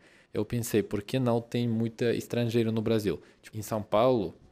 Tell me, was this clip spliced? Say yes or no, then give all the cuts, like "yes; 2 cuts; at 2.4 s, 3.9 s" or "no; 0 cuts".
yes; 1 cut; at 3.5 s